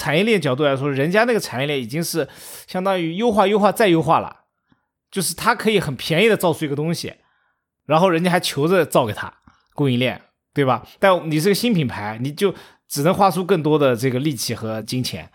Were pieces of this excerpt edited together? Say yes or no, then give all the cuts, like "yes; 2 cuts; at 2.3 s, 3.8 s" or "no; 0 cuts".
no; 0 cuts